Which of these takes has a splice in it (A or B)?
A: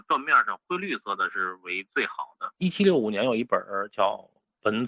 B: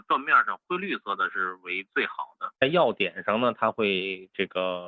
A